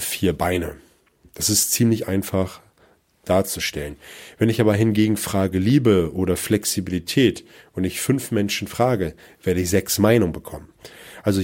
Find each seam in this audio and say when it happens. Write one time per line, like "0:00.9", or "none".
none